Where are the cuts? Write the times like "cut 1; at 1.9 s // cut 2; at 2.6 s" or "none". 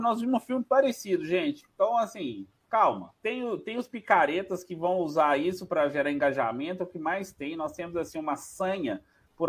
cut 1; at 3.2 s